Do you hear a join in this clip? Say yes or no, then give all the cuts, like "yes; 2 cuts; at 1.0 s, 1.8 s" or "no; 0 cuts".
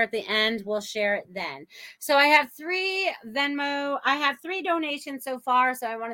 no; 0 cuts